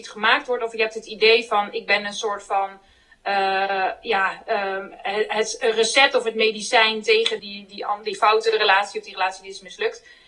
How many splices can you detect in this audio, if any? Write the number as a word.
one